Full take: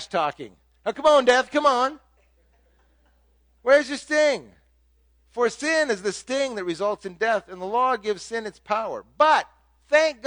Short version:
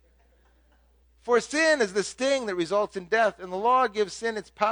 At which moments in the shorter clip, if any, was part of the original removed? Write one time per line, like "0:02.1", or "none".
0:01.0